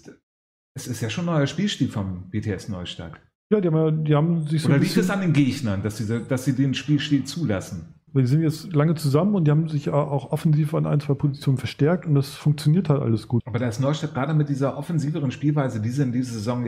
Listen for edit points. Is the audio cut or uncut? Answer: cut